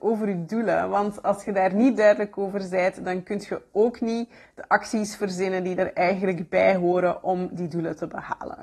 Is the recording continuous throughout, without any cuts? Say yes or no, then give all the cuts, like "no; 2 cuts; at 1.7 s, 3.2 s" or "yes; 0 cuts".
yes; 0 cuts